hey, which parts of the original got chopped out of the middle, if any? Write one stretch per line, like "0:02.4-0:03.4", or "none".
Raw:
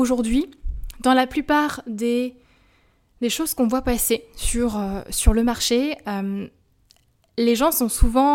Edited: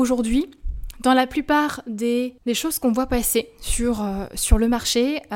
0:02.4-0:03.1